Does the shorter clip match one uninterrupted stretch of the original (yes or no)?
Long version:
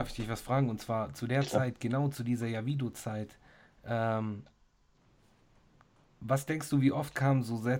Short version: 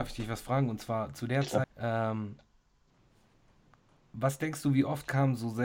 no